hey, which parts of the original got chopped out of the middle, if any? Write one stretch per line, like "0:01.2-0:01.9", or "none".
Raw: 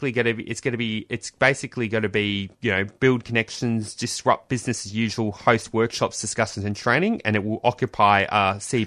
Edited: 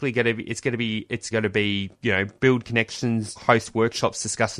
0:01.3-0:01.9
0:03.9-0:05.3